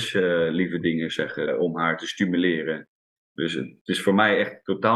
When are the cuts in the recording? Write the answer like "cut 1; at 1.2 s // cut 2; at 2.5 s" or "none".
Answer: cut 1; at 1.5 s

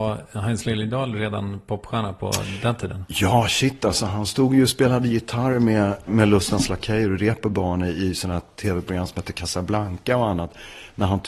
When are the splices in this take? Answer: cut 1; at 6.1 s

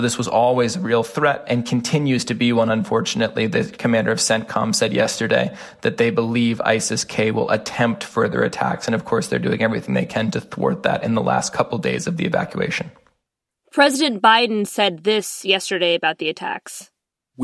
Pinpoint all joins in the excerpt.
none

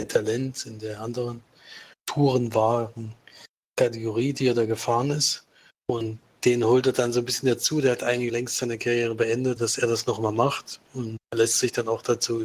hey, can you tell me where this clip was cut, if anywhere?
cut 1; at 5.7 s // cut 2; at 8.3 s // cut 3; at 9.6 s

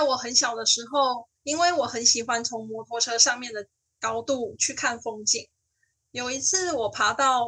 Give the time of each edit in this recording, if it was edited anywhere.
cut 1; at 1.4 s

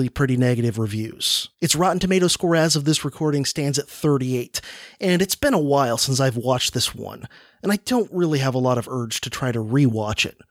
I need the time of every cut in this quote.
cut 1; at 1.5 s

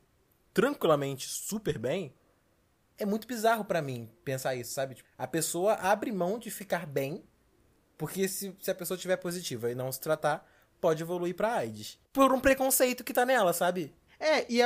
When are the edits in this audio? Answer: none

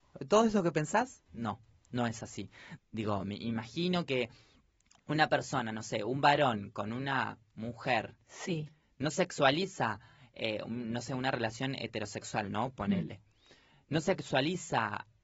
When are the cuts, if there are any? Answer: cut 1; at 2.8 s

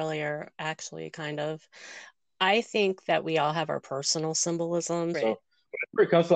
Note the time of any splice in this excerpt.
cut 1; at 5.1 s

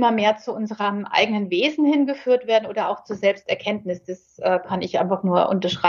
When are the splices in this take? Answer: none

